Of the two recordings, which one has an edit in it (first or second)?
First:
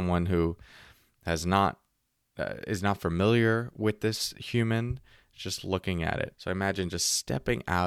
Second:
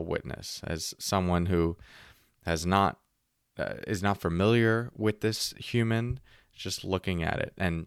first